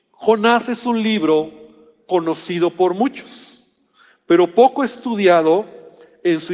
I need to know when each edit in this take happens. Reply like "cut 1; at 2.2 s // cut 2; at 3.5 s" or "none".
none